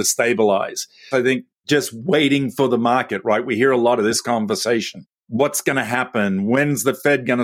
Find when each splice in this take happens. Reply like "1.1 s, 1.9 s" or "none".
1.1 s